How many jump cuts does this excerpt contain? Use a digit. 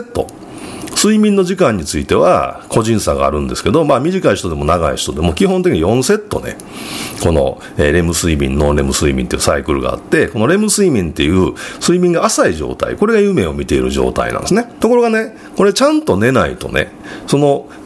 1